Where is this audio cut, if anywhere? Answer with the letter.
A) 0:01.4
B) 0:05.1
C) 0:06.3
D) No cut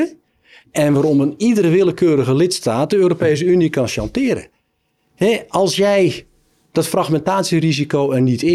D